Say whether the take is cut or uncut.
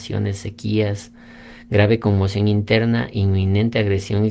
uncut